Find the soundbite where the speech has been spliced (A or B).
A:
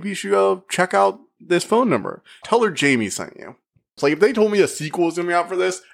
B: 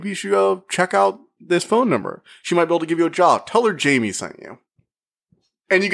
A